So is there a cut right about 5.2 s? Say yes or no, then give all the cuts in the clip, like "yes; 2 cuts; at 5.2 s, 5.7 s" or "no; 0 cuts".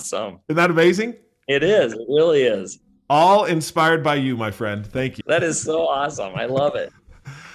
yes; 1 cut; at 5.2 s